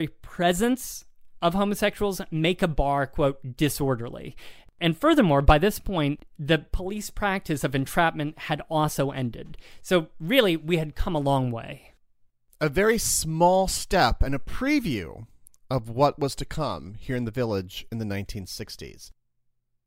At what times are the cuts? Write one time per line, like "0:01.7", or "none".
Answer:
none